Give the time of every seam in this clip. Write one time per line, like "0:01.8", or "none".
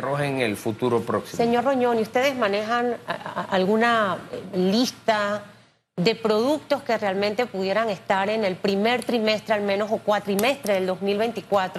none